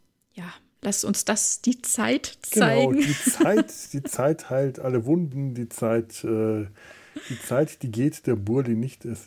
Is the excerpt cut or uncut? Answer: uncut